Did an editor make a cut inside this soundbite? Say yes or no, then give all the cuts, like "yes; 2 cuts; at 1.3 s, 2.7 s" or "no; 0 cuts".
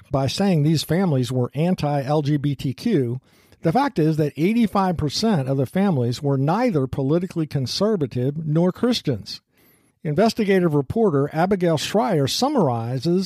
no; 0 cuts